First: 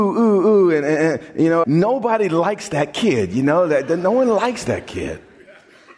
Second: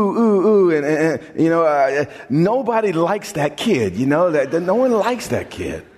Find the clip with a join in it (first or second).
first